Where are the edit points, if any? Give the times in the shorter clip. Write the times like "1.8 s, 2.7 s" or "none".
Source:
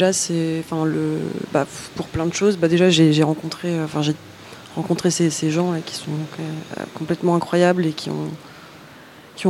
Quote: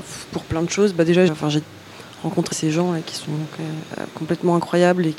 1.3 s, 2.5 s

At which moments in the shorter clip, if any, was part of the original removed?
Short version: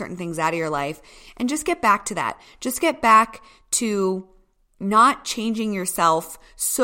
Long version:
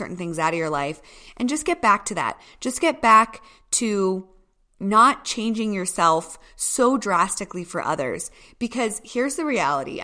none

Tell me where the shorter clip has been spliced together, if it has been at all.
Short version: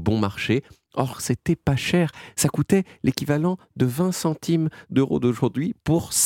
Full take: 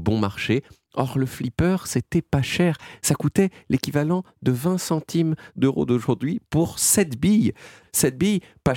1.1 s

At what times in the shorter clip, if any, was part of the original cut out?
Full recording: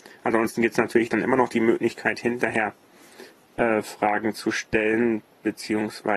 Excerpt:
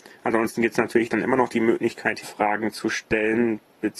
2.2 s

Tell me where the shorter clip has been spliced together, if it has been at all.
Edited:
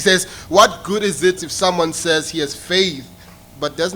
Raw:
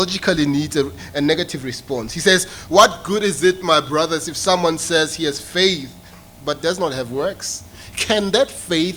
1.4 s

